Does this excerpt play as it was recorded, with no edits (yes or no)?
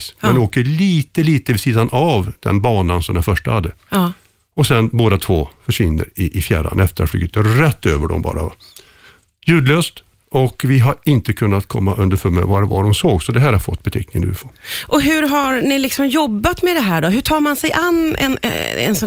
yes